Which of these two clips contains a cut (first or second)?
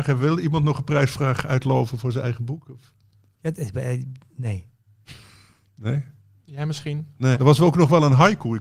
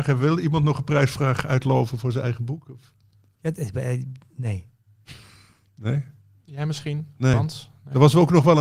first